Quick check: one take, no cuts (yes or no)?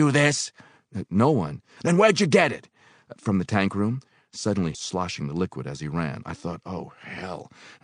no